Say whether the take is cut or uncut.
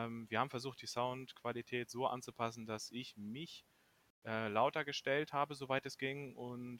uncut